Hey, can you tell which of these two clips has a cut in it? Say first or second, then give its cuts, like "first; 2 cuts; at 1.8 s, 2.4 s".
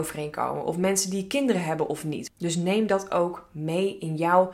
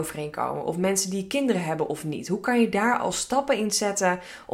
first; 1 cut; at 2.3 s